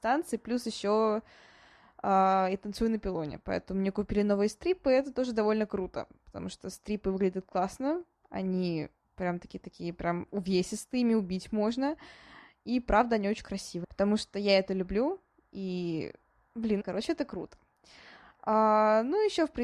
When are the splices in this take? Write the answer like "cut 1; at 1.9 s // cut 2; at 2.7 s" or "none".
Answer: cut 1; at 13.8 s // cut 2; at 16.8 s